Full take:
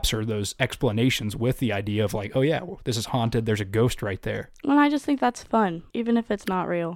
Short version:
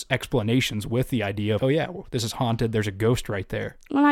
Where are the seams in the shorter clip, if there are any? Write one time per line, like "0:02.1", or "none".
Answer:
0:01.6